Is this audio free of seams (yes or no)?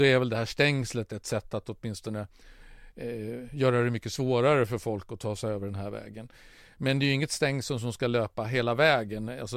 yes